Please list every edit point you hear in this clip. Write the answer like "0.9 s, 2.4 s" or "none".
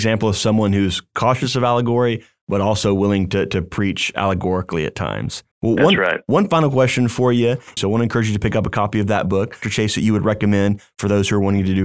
5.5 s, 7.8 s, 9.6 s